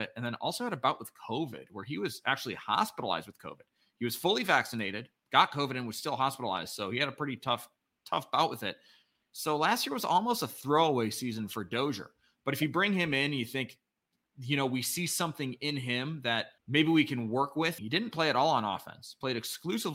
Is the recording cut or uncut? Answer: cut